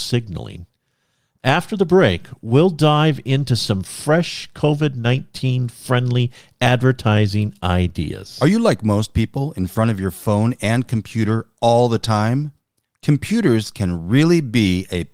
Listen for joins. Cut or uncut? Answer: uncut